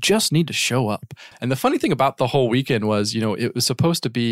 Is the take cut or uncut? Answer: cut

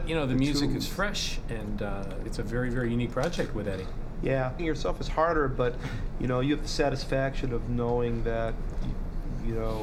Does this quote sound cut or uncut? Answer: cut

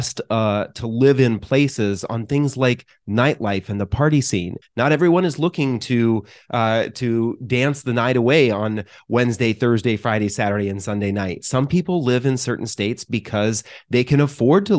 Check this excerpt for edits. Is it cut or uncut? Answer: cut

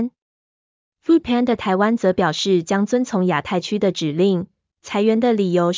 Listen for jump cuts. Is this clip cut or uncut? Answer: cut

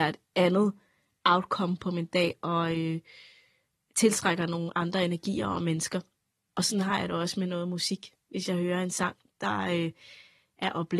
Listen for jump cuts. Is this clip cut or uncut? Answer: uncut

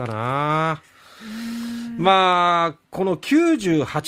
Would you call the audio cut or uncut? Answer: cut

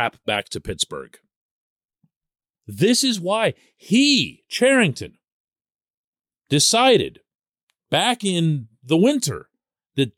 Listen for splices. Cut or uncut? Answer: cut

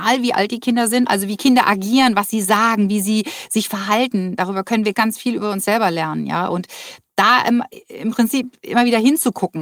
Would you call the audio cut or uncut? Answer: cut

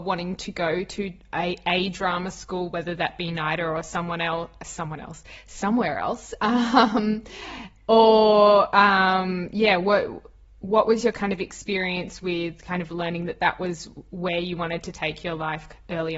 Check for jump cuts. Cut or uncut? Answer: uncut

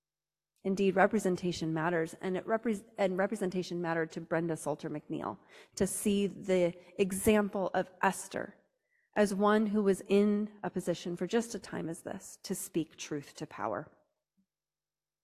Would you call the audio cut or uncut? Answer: uncut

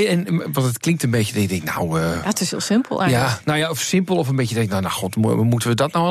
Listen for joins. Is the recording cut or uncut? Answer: uncut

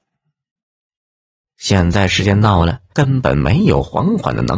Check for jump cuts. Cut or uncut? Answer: cut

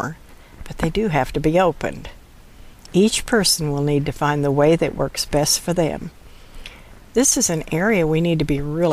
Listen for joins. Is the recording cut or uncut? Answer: cut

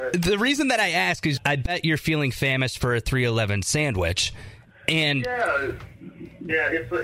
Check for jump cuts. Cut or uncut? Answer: cut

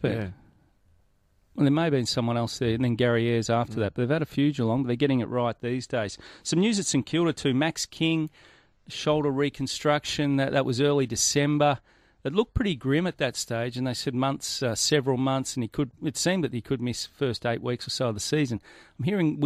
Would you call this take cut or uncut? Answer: uncut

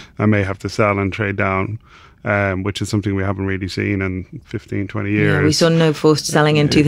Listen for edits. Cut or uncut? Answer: uncut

